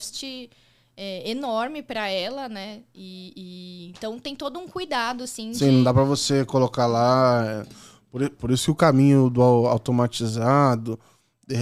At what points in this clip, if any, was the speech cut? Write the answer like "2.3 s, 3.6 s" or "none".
none